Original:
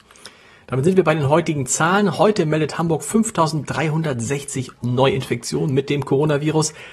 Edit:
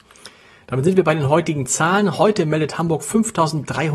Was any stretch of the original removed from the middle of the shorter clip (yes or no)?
no